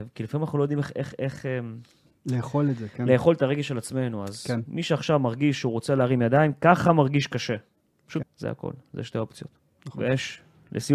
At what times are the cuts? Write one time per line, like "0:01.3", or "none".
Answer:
0:08.2
0:09.8